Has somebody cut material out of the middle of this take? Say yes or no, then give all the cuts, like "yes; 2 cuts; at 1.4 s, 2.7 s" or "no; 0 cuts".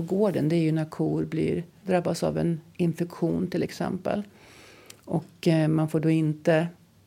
yes; 1 cut; at 1.8 s